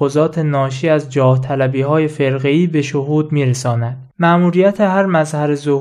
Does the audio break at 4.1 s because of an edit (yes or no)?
yes